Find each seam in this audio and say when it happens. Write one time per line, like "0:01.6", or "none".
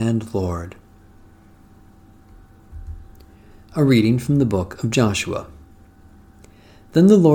none